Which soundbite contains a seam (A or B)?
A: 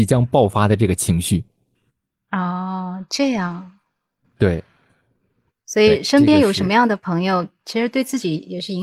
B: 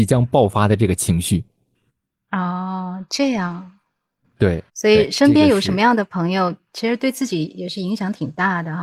B